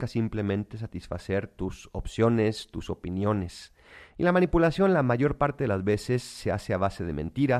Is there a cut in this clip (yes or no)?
yes